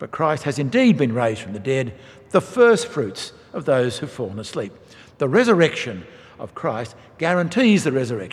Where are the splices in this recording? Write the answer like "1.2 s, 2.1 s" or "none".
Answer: none